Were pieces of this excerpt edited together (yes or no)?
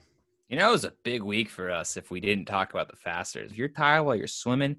yes